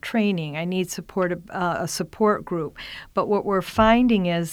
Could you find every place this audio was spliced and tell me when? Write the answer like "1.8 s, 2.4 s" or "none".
none